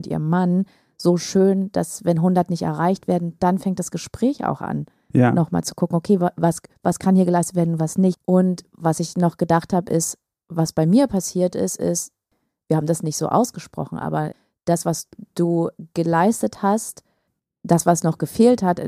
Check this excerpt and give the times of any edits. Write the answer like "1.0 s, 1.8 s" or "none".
8.1 s